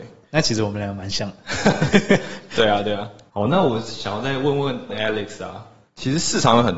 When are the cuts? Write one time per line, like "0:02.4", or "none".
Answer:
none